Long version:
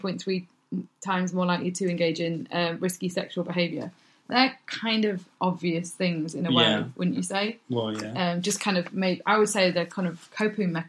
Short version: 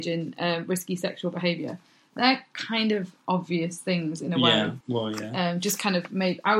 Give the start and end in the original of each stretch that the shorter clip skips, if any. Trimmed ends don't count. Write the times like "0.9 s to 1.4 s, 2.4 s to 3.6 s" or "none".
6.9 s to 7.6 s